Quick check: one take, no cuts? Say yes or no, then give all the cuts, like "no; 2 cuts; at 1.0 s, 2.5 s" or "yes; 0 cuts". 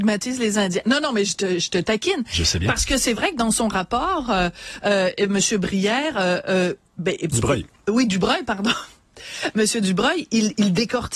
yes; 0 cuts